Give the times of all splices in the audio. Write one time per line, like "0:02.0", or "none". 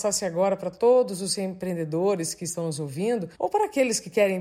0:03.3